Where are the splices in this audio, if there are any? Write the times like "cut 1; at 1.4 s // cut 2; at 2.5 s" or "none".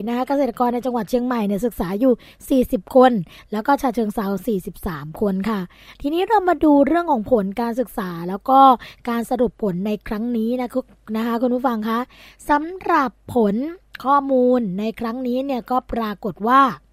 none